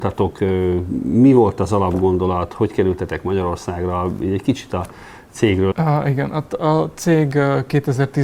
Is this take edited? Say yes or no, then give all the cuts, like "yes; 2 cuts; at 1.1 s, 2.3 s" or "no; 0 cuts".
yes; 1 cut; at 5.7 s